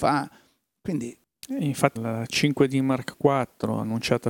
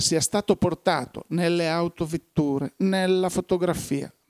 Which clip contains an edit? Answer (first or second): first